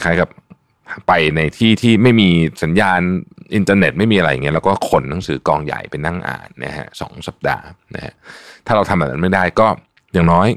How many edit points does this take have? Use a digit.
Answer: 0